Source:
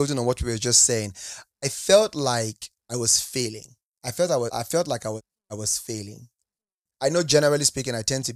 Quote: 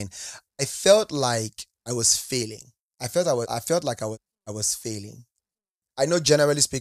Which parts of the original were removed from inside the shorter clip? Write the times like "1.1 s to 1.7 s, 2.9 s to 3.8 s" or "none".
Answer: none